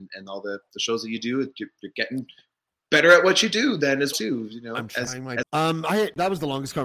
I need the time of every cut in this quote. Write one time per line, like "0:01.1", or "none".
0:04.1
0:05.4